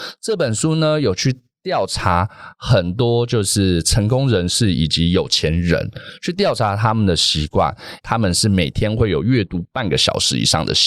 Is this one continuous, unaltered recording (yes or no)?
no